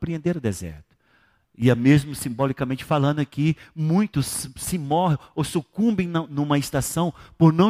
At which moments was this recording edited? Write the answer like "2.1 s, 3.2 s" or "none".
none